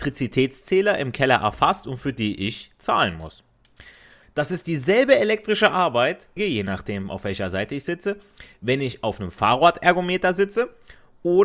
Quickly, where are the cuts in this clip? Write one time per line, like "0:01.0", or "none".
0:04.2
0:06.4